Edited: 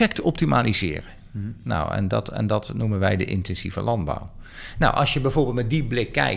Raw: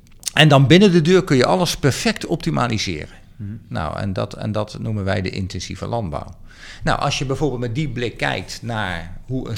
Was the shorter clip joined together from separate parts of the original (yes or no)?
no